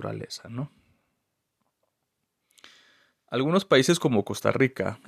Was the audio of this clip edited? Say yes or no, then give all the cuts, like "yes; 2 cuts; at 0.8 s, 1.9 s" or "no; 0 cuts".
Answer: no; 0 cuts